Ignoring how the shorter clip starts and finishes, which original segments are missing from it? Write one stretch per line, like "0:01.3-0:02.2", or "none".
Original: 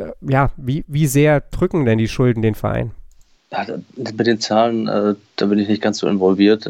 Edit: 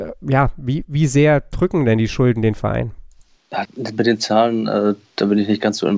0:03.7-0:03.9